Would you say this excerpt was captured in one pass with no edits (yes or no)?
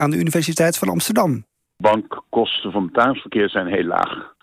yes